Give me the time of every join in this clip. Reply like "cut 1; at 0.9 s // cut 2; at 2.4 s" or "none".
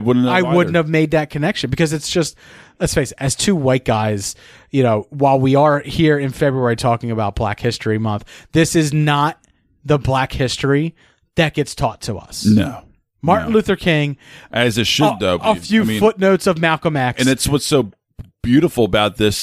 none